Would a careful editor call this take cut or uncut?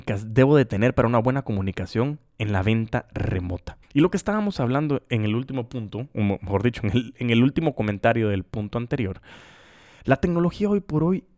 cut